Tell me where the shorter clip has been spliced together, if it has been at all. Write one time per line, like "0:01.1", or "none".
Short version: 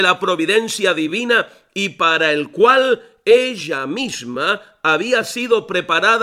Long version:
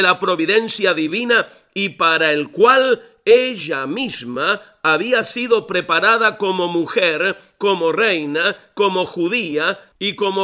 none